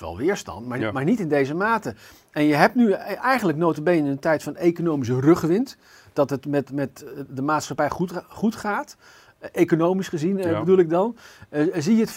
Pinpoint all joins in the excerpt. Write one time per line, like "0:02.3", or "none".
none